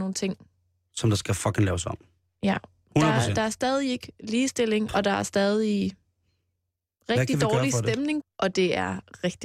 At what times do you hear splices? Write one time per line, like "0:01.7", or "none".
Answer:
0:04.9
0:08.2